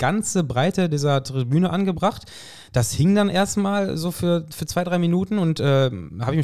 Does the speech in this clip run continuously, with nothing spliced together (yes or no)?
yes